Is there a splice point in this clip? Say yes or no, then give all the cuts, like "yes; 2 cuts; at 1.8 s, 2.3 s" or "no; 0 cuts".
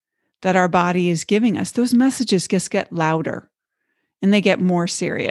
no; 0 cuts